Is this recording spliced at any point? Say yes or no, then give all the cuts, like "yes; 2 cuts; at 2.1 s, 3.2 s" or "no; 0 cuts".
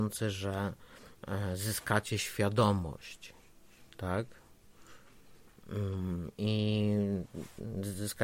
no; 0 cuts